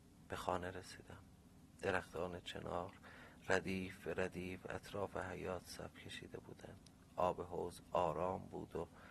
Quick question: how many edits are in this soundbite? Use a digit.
0